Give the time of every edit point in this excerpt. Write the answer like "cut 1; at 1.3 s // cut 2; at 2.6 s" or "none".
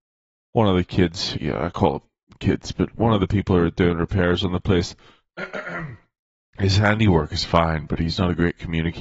cut 1; at 1.3 s